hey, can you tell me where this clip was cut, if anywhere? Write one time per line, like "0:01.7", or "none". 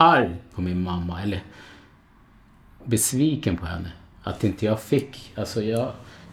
none

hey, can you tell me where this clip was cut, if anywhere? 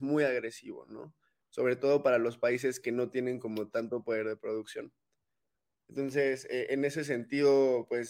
none

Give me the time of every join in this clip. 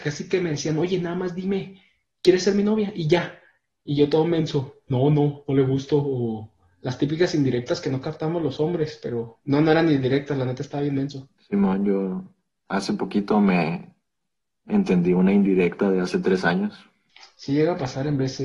none

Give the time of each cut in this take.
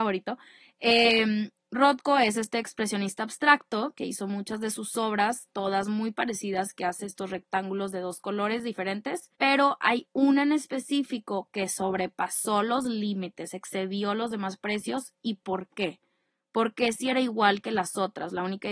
0:09.3

